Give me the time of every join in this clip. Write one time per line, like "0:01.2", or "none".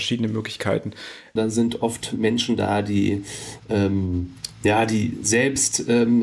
0:01.4